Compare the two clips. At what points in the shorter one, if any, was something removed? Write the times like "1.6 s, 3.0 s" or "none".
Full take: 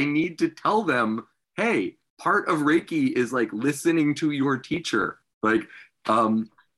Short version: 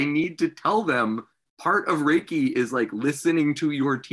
1.5 s